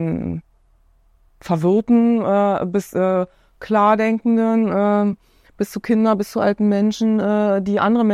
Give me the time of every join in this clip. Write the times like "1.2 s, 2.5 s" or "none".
none